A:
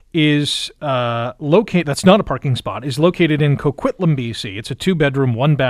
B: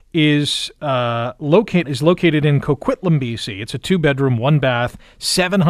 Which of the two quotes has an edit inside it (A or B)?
B